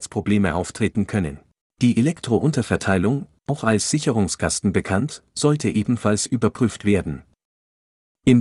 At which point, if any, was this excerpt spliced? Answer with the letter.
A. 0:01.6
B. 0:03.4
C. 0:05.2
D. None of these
A